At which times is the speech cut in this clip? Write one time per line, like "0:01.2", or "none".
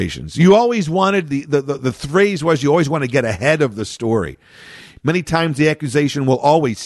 0:01.8
0:05.0

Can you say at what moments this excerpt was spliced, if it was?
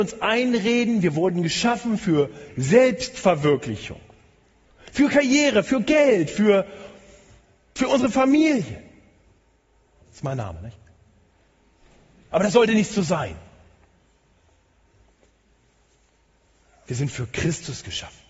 0:10.0

